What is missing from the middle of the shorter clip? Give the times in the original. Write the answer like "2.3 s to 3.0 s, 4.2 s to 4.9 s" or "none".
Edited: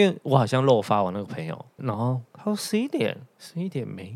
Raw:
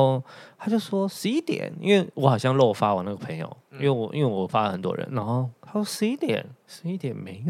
3.7 s to 5.1 s